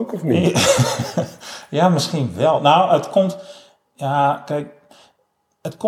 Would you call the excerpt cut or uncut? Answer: uncut